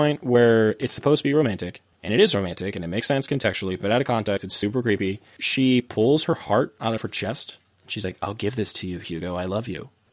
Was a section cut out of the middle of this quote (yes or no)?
no